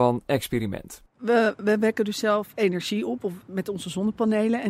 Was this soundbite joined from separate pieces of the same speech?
no; 0 cuts

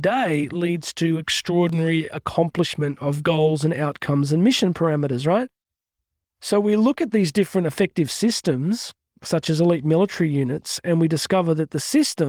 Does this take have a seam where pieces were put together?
no; 0 cuts

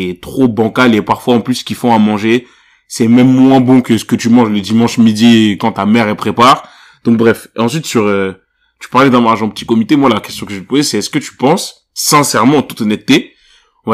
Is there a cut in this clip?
no; 0 cuts

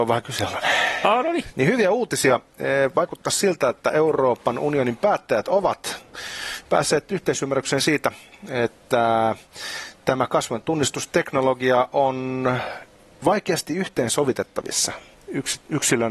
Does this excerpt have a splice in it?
yes; 1 cut; at 1.5 s

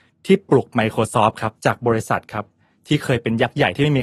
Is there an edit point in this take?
yes; 1 cut; at 1.6 s

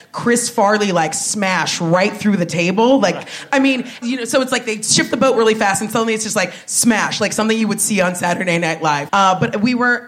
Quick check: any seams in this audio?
yes; 2 cuts; at 4.0 s, 9.1 s

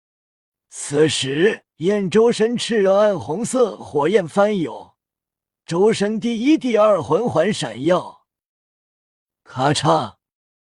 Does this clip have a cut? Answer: yes; 1 cut; at 1.7 s

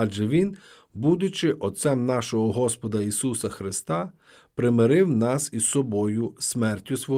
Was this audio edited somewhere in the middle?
no; 0 cuts

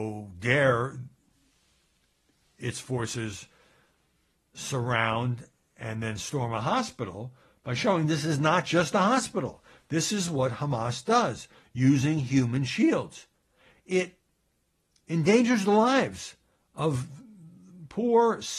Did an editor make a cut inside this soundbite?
no; 0 cuts

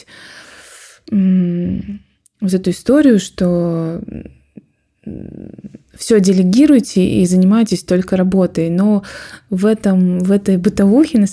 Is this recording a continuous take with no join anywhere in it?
yes; 0 cuts

